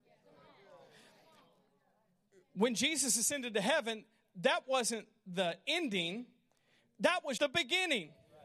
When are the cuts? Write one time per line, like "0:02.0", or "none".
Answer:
0:07.4